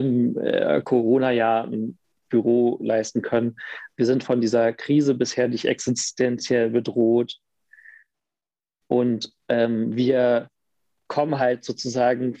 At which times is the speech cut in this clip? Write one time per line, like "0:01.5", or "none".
none